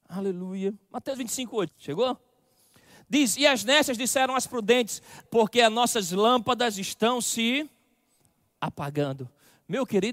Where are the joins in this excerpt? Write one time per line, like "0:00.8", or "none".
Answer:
0:01.7
0:05.3